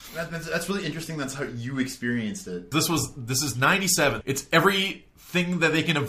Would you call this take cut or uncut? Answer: cut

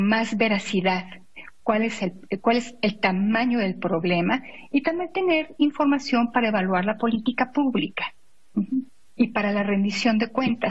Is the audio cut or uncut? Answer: uncut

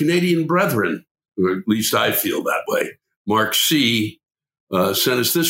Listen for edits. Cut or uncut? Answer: uncut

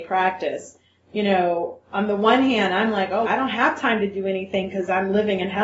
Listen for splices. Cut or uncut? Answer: cut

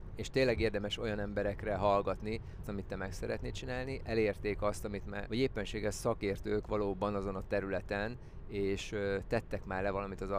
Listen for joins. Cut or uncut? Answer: cut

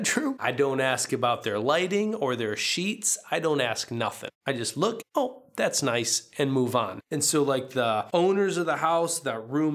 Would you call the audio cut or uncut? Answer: cut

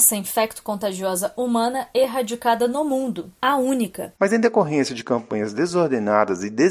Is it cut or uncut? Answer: cut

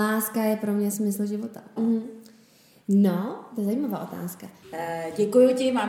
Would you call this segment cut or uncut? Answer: cut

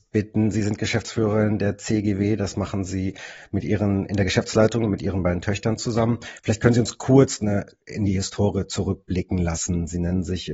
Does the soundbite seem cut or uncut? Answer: uncut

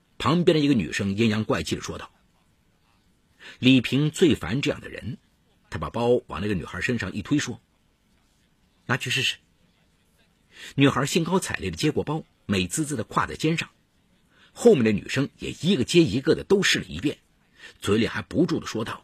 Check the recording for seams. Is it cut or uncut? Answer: uncut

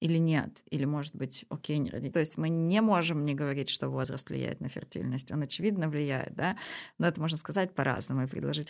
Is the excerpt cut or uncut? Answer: cut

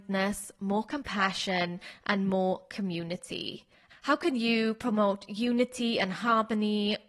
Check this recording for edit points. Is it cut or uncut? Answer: cut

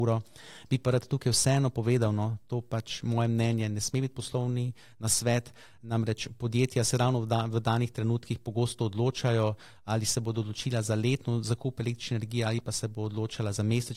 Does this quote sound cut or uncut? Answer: uncut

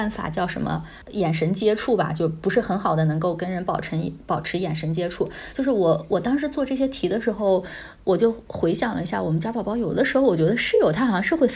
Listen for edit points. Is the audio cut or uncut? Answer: uncut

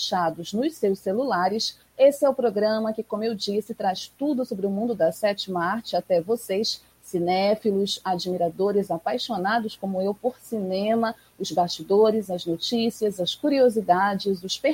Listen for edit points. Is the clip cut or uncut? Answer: cut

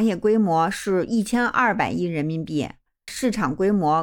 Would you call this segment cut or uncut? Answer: cut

